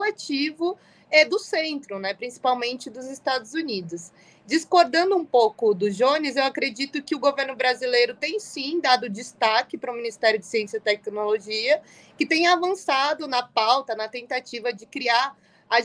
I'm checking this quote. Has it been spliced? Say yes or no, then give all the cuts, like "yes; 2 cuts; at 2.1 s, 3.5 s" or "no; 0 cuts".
no; 0 cuts